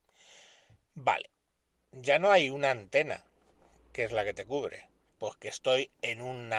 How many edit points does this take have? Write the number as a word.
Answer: two